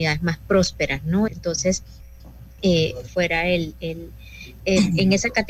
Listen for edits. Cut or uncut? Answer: cut